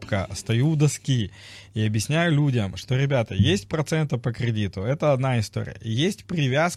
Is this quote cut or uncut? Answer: uncut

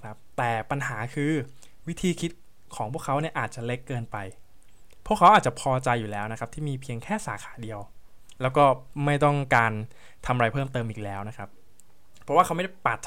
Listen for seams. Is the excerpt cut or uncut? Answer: uncut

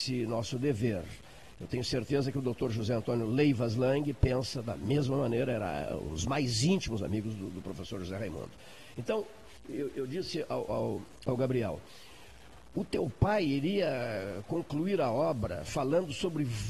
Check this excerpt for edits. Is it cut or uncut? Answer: uncut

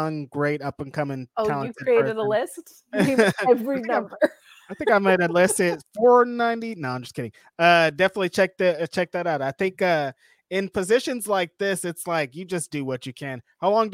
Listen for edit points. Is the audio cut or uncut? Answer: uncut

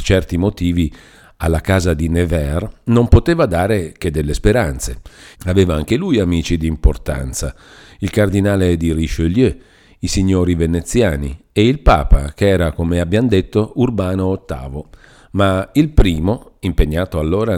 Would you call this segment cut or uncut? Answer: cut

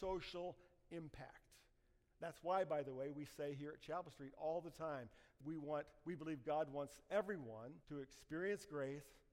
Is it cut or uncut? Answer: cut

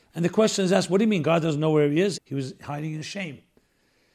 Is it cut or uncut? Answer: cut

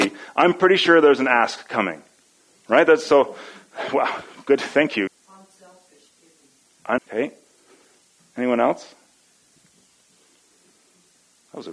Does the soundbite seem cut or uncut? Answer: cut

